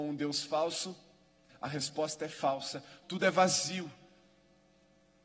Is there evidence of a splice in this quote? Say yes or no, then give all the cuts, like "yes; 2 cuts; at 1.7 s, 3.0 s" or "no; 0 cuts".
yes; 2 cuts; at 1.5 s, 3.0 s